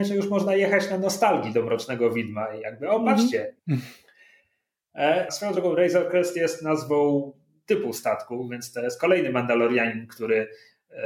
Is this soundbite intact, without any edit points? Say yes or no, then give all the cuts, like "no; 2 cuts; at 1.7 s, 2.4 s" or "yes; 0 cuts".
no; 2 cuts; at 3.6 s, 5.3 s